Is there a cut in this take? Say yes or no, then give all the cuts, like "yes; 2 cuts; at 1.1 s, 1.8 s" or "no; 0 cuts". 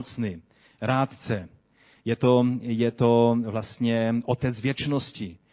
no; 0 cuts